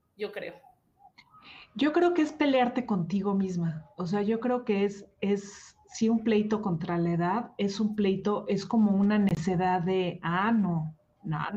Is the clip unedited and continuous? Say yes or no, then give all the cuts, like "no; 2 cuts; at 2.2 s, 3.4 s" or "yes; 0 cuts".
yes; 0 cuts